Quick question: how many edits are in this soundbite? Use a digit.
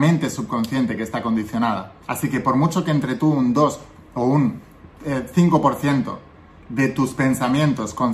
1